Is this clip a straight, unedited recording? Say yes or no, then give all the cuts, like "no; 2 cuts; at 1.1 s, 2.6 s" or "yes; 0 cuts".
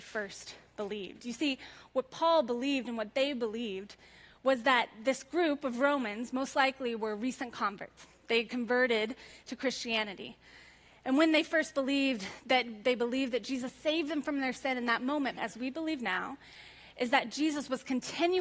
no; 1 cut; at 15.4 s